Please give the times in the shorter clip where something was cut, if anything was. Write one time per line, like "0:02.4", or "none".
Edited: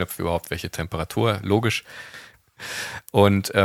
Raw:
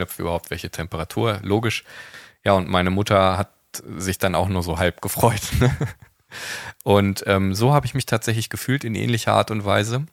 0:02.3

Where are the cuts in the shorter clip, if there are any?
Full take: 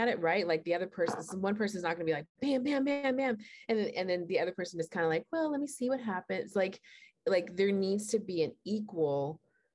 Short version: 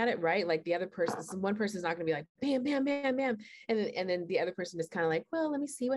none

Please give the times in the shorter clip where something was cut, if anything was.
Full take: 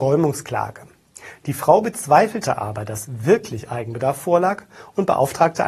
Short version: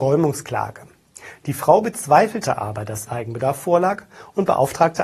0:03.1

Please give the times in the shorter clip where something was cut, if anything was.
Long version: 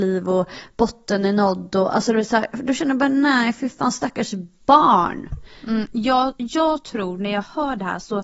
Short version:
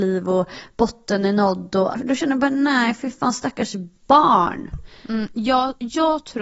0:01.9

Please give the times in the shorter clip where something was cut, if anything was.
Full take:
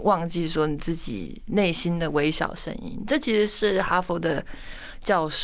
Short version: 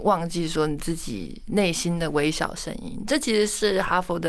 none

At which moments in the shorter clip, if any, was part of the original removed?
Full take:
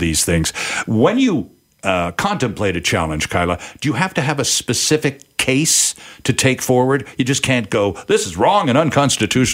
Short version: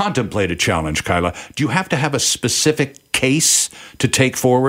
none

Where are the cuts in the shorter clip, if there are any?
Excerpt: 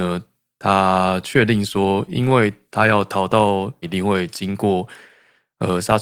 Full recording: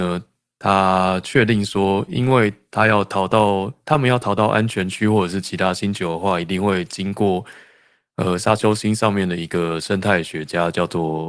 0:03.8

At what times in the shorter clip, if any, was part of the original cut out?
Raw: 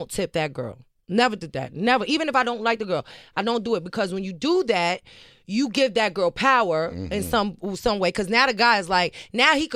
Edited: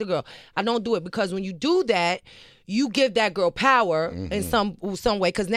none

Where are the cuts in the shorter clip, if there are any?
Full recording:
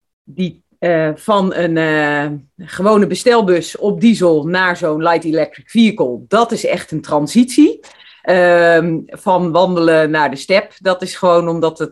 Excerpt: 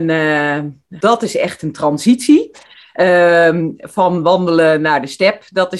0:01.0

